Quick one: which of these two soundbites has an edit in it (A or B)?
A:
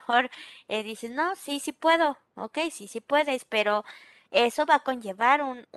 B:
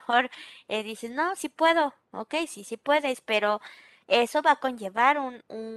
B